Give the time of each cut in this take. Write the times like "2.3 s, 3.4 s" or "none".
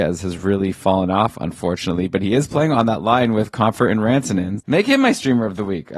4.6 s